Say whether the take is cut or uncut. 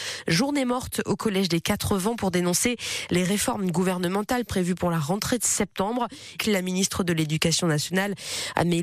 cut